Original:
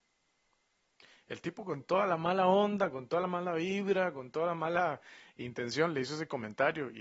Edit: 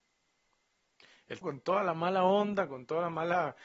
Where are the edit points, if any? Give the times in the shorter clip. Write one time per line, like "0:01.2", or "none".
0:01.4
0:02.7